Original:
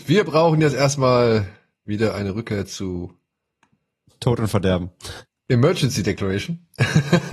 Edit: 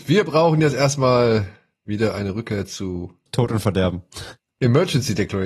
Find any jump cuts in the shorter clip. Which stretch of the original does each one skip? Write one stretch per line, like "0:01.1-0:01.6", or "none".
0:03.3-0:04.1